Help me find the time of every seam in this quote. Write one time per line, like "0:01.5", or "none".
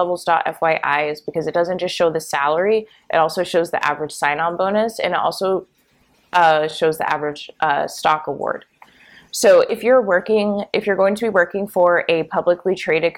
none